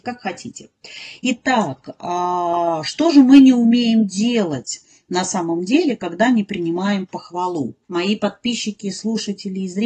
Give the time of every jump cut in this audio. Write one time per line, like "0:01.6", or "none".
0:07.8